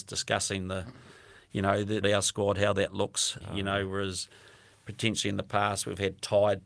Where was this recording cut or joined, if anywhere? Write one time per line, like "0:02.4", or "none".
0:02.0
0:03.4